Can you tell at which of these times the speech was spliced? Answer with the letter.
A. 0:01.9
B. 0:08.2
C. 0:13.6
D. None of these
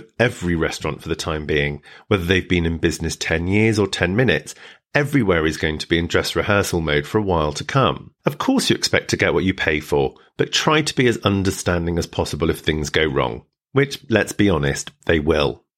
D